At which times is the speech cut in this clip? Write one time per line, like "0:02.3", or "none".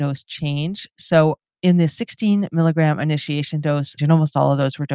0:04.0